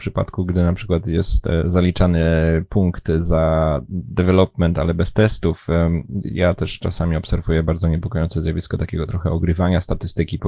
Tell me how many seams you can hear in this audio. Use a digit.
0